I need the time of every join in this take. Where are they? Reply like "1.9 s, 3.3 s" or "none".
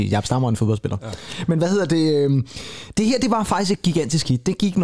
none